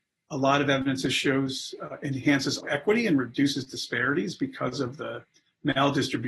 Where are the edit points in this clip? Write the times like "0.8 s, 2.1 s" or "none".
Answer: 2.6 s